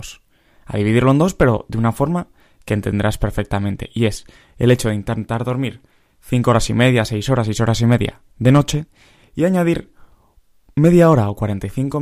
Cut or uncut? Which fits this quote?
uncut